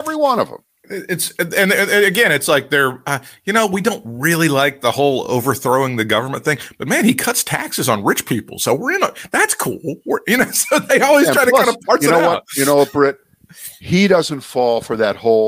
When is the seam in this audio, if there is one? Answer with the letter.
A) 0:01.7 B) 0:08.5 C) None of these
C